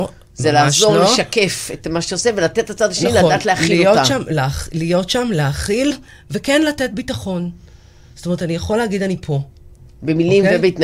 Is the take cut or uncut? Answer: uncut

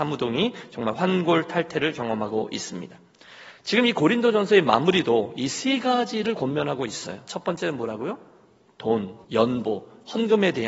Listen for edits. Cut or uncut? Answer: cut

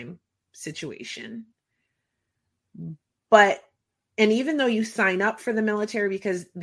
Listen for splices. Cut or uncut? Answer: uncut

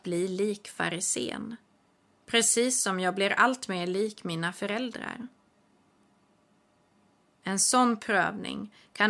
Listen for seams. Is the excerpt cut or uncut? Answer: cut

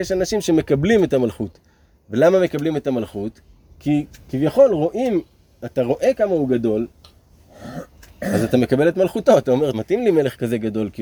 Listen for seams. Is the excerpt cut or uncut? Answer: cut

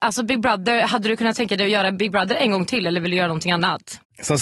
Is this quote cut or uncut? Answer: uncut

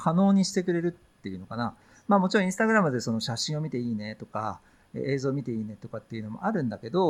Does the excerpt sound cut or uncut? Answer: uncut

